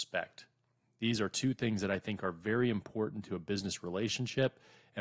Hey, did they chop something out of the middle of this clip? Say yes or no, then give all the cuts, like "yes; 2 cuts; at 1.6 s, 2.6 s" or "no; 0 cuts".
no; 0 cuts